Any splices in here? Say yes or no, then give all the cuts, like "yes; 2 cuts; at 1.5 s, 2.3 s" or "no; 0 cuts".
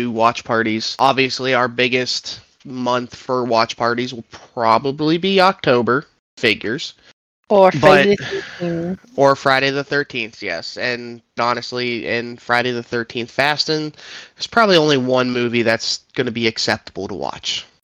yes; 1 cut; at 11.4 s